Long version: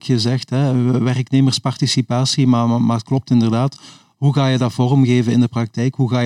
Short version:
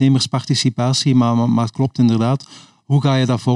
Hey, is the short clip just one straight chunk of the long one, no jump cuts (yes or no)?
yes